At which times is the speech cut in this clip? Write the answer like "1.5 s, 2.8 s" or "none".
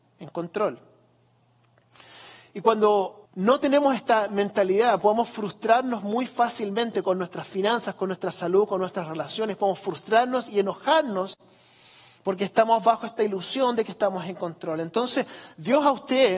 3.3 s